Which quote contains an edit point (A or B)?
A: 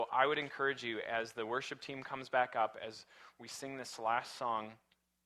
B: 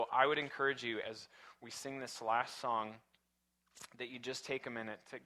B